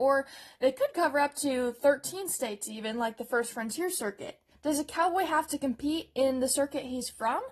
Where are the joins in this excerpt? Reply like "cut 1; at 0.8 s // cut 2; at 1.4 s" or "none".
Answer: cut 1; at 4.5 s